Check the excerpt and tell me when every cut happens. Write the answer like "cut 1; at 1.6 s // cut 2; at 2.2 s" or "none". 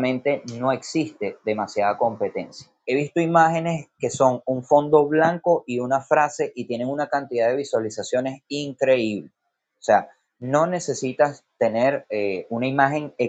cut 1; at 2.8 s